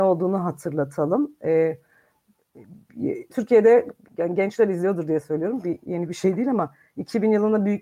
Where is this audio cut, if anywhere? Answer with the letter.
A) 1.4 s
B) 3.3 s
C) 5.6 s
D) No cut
B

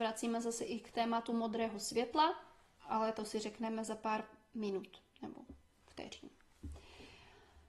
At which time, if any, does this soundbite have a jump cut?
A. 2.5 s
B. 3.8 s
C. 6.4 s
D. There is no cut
D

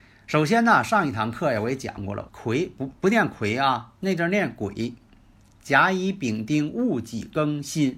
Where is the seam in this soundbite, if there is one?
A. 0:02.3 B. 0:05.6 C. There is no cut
A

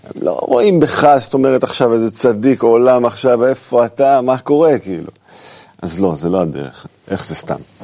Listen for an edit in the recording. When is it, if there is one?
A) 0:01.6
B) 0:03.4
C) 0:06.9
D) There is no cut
C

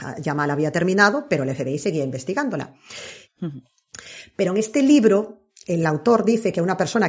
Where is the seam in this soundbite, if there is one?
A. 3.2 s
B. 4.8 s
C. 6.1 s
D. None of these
A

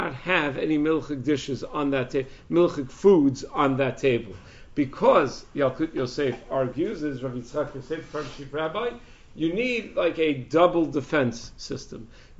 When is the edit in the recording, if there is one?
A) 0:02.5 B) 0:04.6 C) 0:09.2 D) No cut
D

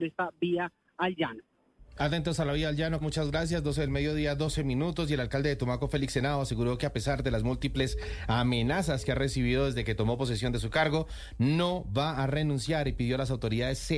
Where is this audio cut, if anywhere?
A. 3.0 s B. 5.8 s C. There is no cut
A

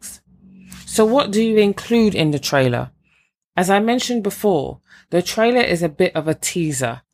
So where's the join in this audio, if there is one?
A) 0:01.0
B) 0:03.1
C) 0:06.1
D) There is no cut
D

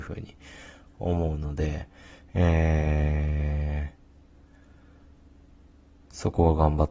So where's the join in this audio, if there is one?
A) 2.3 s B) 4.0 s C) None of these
C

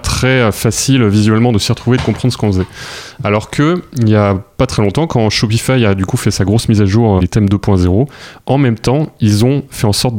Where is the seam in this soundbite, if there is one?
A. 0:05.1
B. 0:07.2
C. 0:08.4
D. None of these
B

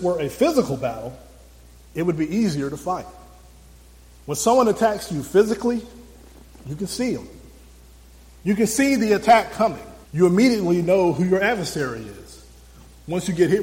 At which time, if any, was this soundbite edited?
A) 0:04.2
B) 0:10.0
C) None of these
B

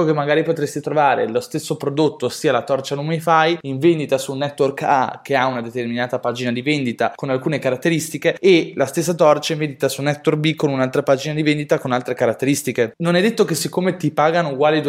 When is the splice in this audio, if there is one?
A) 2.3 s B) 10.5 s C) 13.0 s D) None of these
D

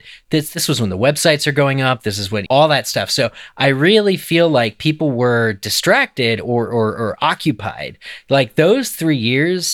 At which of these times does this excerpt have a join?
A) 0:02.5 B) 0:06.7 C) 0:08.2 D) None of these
A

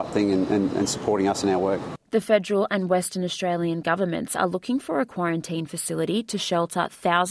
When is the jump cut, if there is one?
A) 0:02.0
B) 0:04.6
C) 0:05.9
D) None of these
A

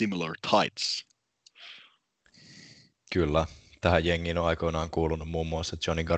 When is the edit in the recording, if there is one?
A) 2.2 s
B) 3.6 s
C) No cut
C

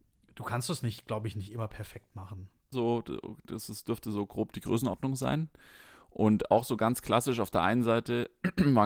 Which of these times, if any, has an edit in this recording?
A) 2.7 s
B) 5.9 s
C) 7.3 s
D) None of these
A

